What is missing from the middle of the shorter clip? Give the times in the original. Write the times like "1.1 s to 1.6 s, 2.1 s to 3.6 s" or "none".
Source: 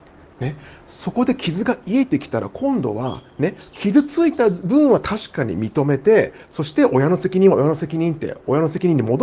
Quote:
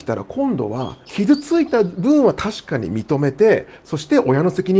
3.3 s to 3.7 s